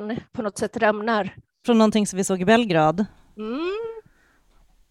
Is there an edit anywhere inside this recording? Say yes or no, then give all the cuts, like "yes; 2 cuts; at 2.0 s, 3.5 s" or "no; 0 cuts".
yes; 1 cut; at 1.6 s